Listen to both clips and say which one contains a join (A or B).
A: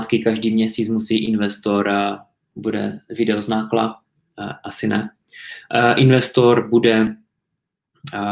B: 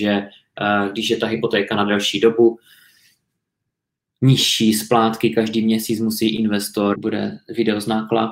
B